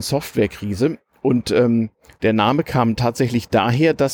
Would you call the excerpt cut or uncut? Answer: uncut